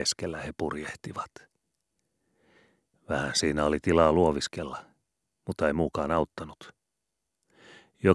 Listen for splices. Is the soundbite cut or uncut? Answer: uncut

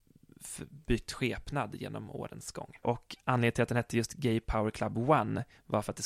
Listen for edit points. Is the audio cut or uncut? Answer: cut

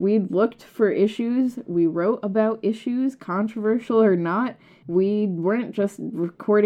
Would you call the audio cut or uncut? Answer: uncut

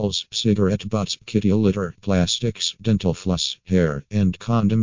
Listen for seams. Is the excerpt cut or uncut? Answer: uncut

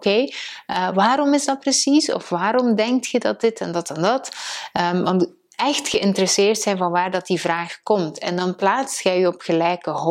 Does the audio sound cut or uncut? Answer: uncut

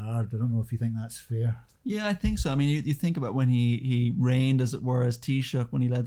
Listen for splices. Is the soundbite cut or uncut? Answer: uncut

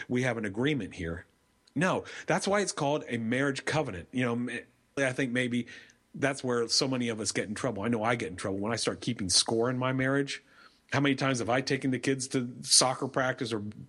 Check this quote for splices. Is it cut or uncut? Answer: cut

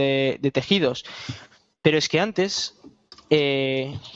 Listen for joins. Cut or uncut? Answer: uncut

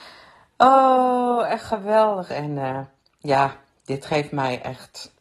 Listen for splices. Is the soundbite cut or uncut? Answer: cut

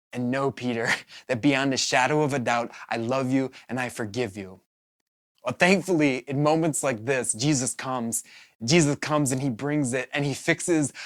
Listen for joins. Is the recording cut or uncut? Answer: cut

